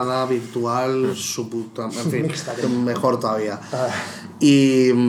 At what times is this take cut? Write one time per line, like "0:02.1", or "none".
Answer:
0:02.6